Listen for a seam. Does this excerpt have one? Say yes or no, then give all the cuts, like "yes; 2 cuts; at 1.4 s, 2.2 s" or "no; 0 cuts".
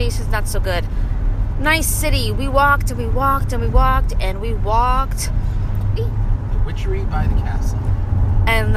yes; 1 cut; at 6.0 s